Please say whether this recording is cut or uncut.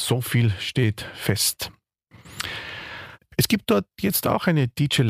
cut